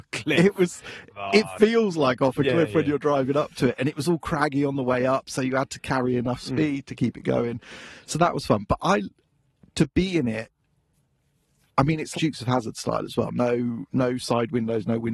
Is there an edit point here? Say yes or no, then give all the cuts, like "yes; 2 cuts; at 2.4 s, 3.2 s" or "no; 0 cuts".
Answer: yes; 2 cuts; at 1.1 s, 12.1 s